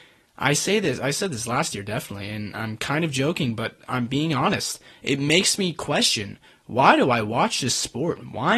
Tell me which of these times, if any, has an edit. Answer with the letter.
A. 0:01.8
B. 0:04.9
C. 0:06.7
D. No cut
D